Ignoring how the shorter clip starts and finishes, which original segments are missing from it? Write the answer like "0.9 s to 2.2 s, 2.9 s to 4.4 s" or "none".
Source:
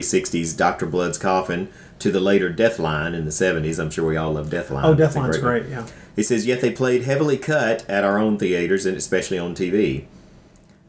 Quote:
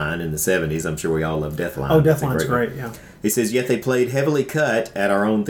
none

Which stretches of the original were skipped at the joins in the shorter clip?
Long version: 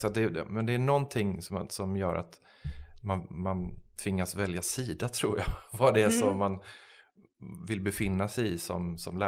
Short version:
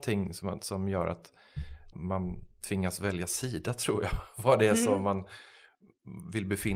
3.0 s to 3.3 s

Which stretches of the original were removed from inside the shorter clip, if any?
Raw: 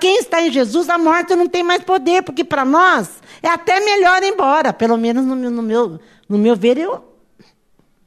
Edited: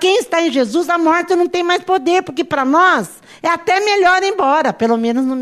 none

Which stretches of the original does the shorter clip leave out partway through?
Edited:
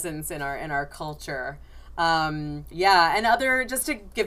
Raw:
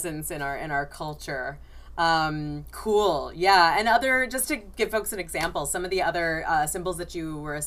2.7 s to 3.3 s

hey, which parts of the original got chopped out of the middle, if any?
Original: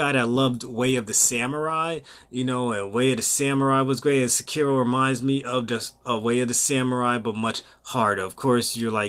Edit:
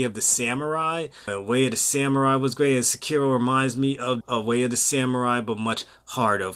2.2 s to 2.7 s, 5.7 s to 6.0 s

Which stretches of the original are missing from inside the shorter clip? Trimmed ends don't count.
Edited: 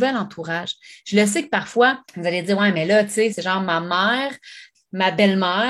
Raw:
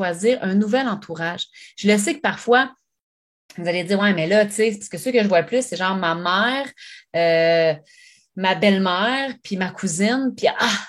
2.8 s to 3.5 s, 4.7 s to 5.7 s, 7.1 s to 8.2 s

